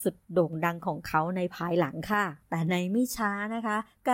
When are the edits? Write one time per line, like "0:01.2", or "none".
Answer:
0:02.4

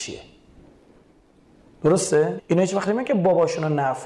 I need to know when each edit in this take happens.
0:02.4

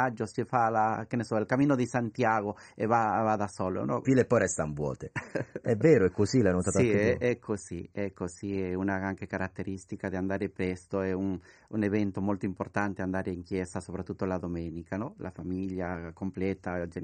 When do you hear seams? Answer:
0:04.0

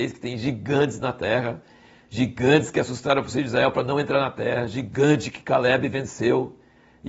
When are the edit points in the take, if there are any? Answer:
none

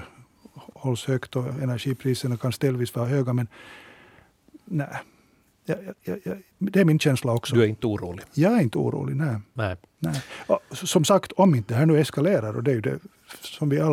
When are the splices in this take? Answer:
none

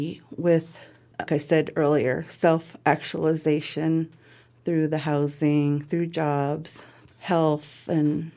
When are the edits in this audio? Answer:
0:01.3
0:07.1

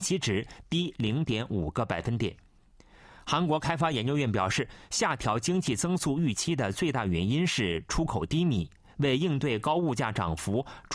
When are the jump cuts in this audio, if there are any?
none

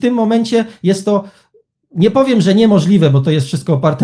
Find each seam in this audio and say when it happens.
none

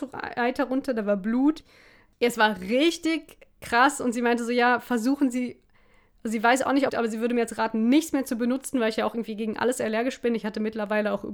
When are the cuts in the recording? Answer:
0:06.9

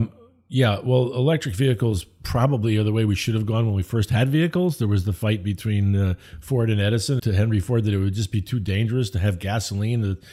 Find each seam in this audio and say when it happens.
0:07.2

